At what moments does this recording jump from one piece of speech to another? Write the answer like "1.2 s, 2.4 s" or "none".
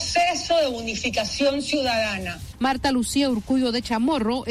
2.5 s